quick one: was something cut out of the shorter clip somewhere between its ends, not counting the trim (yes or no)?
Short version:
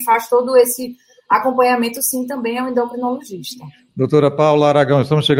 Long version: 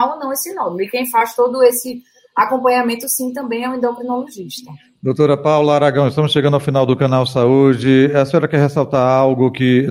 no